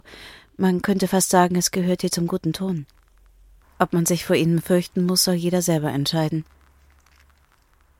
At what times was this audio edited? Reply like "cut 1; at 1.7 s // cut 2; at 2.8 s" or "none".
cut 1; at 3.6 s